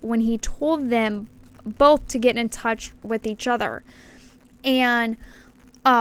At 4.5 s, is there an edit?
yes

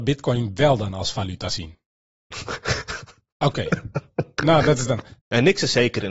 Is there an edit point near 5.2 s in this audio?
yes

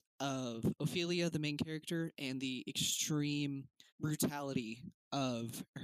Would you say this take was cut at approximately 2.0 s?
no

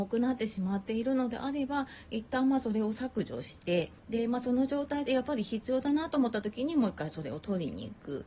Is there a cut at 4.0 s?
yes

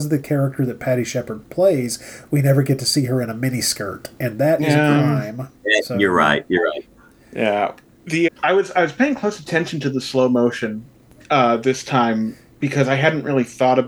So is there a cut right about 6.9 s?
yes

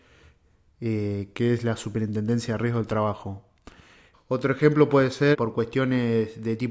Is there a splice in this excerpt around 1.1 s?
no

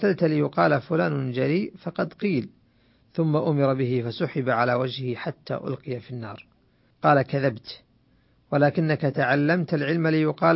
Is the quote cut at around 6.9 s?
yes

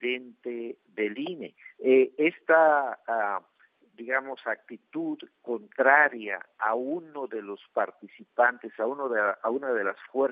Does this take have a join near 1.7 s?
yes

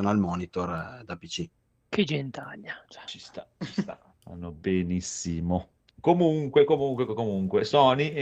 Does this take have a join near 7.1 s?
yes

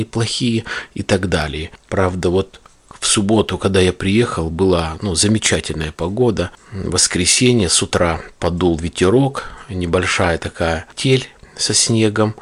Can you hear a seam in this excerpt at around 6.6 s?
no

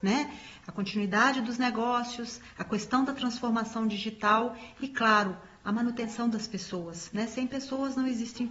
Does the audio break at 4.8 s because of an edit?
no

